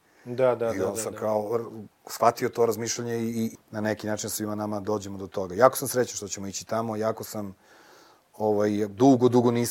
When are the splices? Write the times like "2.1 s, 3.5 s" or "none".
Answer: 3.5 s